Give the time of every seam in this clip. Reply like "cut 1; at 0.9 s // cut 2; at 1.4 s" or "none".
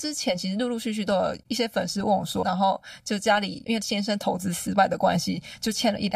cut 1; at 2.4 s